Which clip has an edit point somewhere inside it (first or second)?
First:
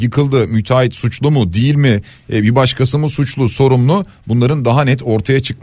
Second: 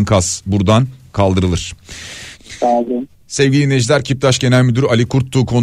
second